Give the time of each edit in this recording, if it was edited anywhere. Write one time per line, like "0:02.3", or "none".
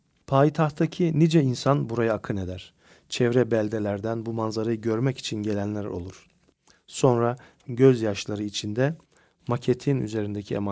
none